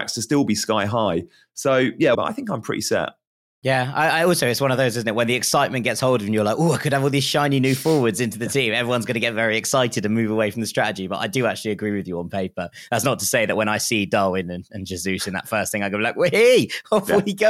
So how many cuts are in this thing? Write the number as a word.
one